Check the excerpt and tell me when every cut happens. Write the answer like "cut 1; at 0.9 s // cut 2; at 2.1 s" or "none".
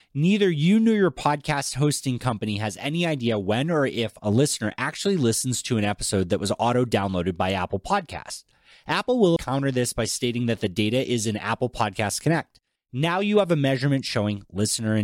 cut 1; at 9.4 s // cut 2; at 12.8 s

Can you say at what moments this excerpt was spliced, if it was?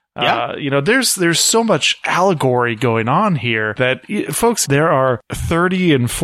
cut 1; at 4.6 s

